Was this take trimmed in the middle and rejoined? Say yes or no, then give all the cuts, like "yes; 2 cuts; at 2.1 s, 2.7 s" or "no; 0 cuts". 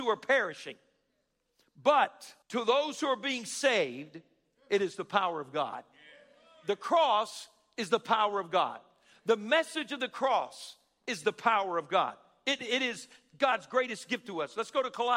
yes; 2 cuts; at 2.4 s, 12.6 s